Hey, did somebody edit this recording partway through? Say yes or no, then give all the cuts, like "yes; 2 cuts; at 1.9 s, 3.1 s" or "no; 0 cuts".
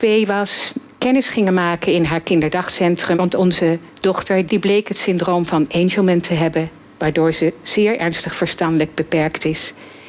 yes; 2 cuts; at 3.1 s, 4.5 s